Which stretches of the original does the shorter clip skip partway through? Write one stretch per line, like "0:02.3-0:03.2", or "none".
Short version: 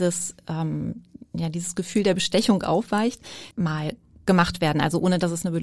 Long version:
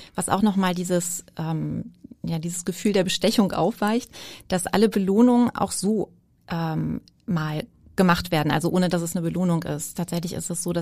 0:04.4-0:07.2